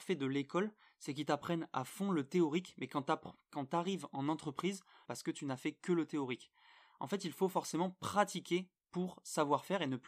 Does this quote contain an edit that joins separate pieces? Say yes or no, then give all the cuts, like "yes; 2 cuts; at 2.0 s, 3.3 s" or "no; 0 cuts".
yes; 1 cut; at 5.0 s